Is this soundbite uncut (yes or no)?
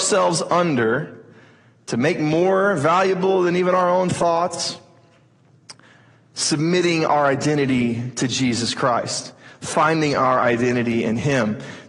yes